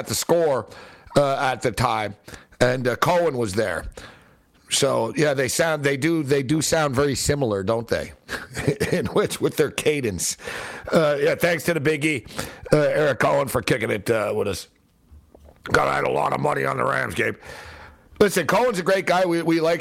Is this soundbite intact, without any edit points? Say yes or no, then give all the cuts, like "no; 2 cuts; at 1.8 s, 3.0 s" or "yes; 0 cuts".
yes; 0 cuts